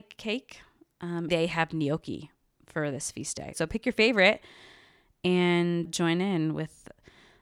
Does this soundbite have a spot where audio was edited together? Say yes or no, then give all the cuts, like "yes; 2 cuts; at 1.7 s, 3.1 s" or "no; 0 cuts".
yes; 3 cuts; at 1.3 s, 3.5 s, 5.9 s